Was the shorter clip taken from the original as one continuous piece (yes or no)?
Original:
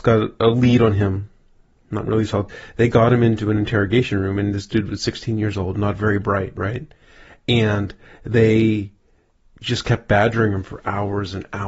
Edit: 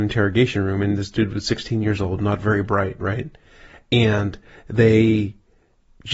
yes